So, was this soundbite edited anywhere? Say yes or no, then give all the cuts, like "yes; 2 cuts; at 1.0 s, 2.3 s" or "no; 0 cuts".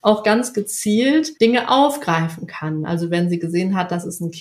yes; 1 cut; at 1.4 s